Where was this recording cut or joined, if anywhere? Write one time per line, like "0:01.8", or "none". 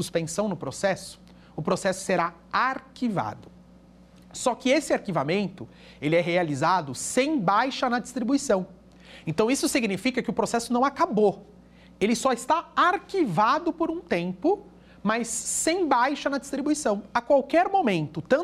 none